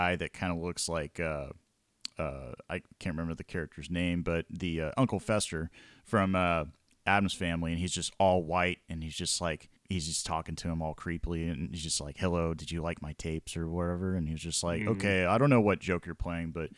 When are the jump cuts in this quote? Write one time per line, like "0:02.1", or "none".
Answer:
0:09.8

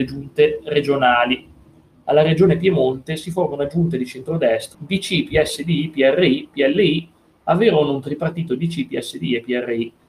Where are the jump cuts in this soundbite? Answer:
0:04.7

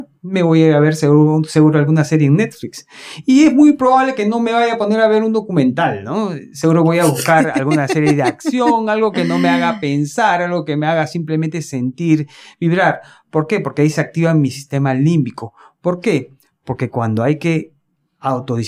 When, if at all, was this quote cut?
none

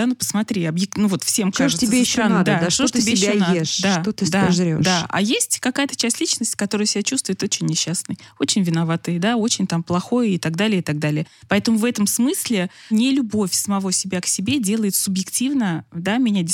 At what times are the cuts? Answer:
none

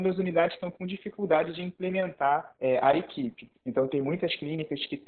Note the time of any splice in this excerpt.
0:03.5

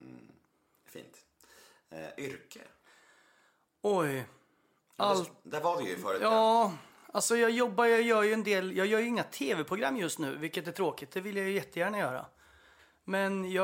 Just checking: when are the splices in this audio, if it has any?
none

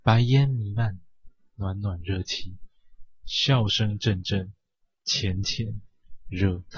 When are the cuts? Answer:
none

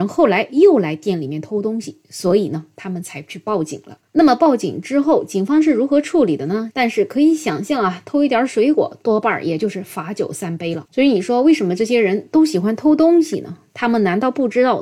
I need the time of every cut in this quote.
0:06.7

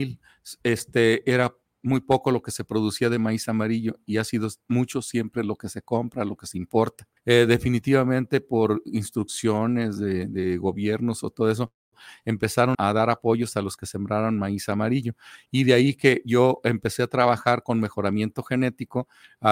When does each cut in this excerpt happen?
0:07.2
0:12.7

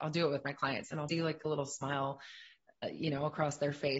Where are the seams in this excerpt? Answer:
0:01.1

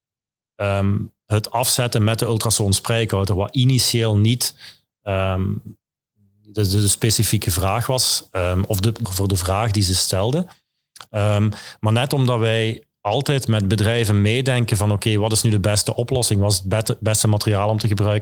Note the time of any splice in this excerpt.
0:09.0

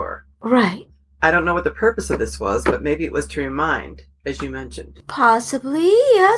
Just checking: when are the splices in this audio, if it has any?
none

